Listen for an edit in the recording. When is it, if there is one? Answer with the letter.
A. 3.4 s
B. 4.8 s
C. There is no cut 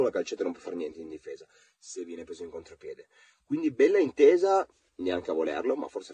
C